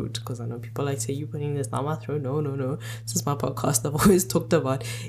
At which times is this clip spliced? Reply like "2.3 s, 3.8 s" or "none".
none